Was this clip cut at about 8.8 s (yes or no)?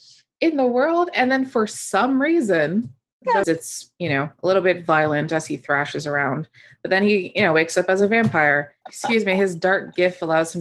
yes